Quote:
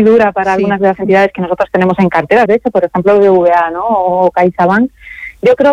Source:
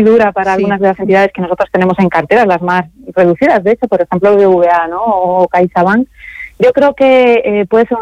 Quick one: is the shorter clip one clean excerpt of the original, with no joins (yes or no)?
no